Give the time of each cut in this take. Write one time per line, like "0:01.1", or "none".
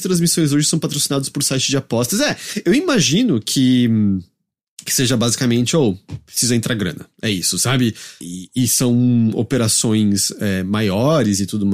0:08.2